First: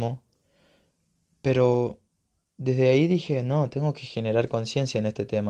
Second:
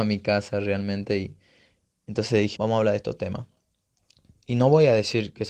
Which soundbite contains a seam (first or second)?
second